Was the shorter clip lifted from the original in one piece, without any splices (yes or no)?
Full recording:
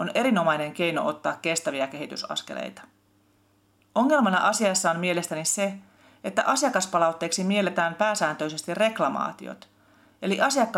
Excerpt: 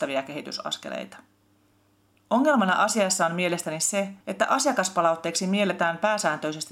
no